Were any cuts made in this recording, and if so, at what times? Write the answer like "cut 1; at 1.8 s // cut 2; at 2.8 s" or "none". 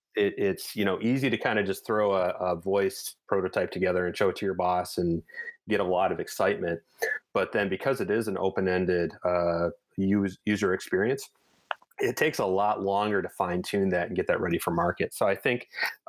none